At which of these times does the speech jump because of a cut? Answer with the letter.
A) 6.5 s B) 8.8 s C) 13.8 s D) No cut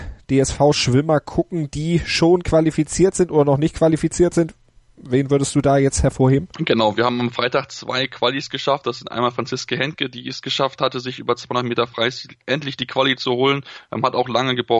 A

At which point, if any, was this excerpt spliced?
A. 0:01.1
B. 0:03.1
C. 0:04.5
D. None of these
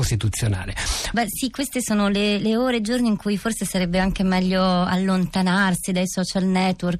A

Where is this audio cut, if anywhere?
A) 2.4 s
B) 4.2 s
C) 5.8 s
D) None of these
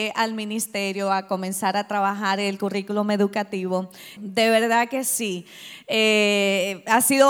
B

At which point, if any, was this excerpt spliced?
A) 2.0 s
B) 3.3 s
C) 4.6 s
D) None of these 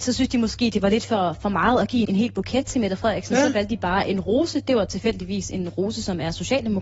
A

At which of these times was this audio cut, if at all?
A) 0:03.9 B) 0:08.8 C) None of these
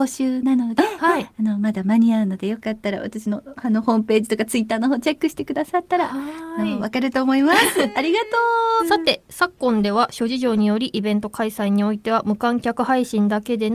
B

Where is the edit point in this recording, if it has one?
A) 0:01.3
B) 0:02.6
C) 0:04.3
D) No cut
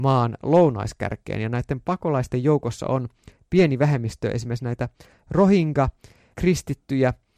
D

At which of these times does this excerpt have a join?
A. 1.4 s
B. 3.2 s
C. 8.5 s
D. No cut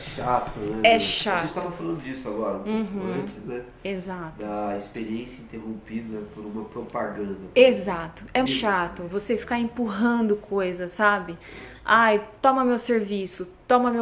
C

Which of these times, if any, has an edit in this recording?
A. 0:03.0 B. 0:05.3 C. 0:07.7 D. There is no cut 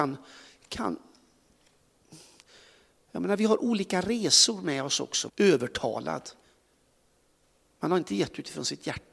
B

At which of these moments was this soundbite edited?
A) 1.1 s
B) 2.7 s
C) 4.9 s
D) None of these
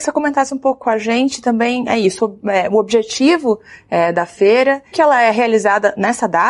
C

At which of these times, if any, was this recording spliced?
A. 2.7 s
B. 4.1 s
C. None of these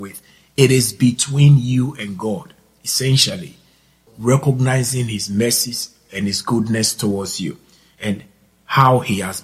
B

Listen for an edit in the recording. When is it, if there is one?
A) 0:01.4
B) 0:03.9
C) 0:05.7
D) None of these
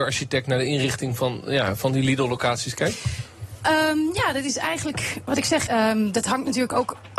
C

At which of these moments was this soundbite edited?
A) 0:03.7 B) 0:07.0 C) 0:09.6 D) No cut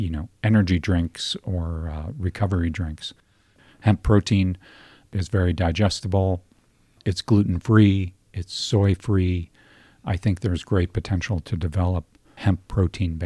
D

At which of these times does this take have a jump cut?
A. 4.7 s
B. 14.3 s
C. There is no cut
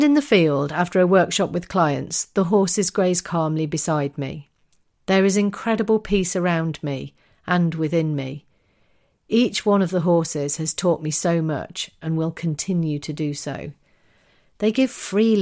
C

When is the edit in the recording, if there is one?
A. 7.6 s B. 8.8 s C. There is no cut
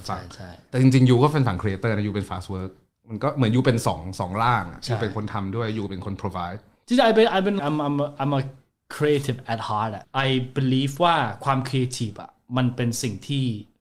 A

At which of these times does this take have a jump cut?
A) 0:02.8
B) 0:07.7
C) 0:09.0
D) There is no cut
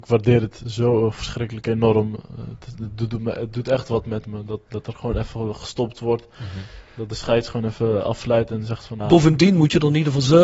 C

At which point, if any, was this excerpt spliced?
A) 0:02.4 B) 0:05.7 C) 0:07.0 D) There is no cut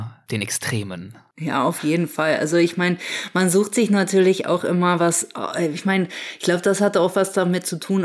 D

